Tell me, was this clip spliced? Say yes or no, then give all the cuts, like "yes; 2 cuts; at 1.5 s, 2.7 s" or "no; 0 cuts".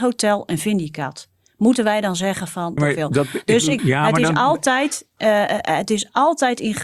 yes; 2 cuts; at 2.8 s, 3.8 s